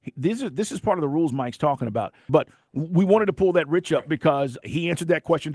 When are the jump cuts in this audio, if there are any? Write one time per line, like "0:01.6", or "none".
0:02.3
0:04.6